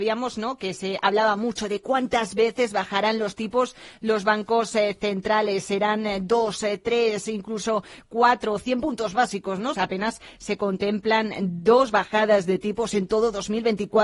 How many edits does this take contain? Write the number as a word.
one